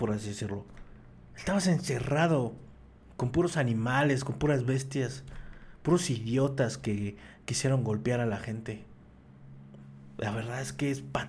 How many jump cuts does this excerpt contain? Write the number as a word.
zero